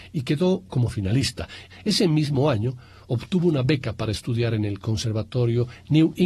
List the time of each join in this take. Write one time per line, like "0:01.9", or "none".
0:01.7